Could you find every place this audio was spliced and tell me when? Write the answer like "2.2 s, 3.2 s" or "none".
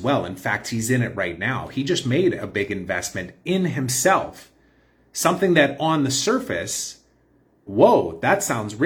7.7 s